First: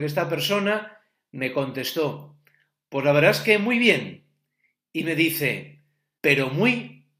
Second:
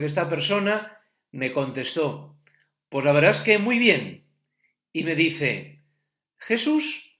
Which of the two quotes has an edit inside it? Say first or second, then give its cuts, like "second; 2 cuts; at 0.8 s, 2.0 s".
first; 1 cut; at 6.2 s